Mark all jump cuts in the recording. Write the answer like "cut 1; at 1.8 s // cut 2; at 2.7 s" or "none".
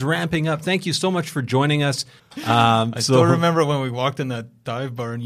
cut 1; at 2.2 s